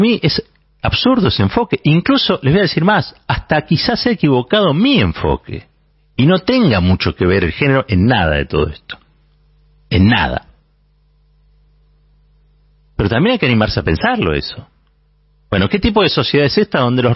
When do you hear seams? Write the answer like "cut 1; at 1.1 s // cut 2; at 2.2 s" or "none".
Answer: none